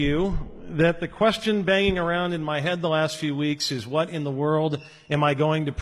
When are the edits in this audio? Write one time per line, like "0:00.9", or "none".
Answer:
none